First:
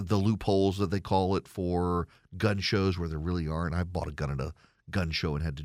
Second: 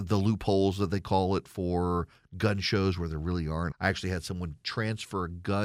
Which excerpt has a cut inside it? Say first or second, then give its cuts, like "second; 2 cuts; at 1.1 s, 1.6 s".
second; 1 cut; at 3.7 s